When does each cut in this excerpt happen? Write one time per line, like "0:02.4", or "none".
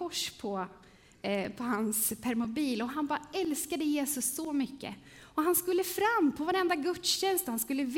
none